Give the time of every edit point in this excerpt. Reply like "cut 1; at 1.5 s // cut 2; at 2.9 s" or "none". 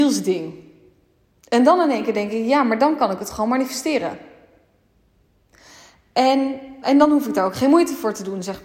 cut 1; at 6.8 s